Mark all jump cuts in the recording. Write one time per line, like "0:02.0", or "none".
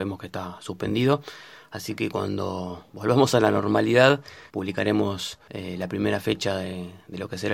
0:04.5

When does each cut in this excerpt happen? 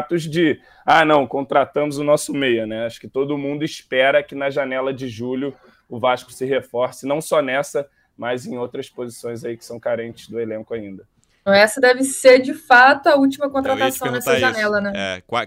0:11.5

